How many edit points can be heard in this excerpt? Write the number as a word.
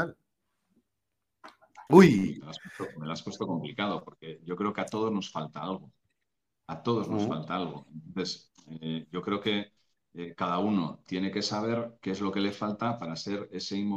one